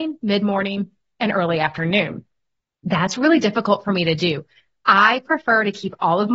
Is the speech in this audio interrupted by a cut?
no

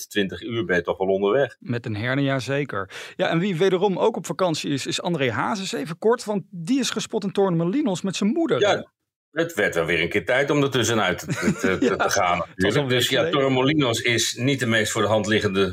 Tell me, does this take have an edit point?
no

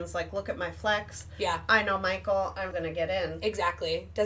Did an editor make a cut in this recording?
yes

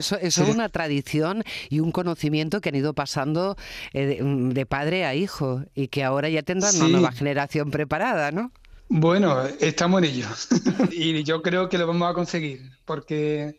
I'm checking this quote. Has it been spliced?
yes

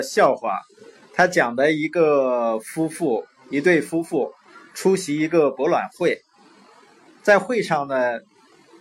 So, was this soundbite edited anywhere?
no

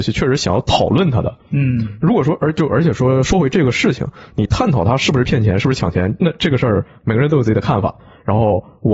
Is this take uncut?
yes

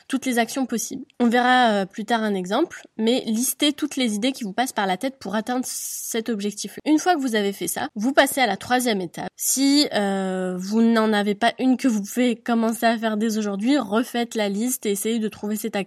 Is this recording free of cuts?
no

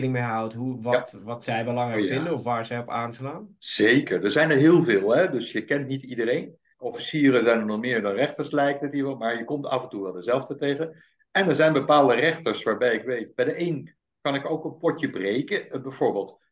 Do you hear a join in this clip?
yes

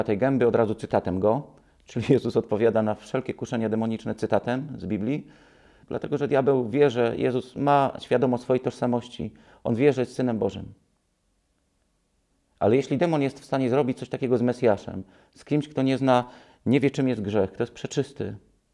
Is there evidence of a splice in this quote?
yes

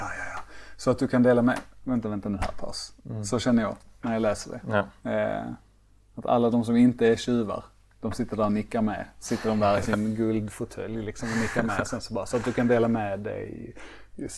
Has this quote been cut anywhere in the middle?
no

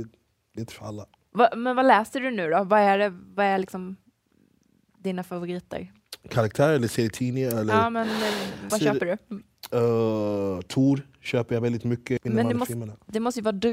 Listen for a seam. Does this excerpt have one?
yes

